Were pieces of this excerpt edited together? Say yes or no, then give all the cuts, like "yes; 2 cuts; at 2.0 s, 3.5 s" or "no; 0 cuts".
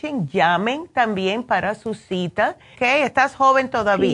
yes; 1 cut; at 2.7 s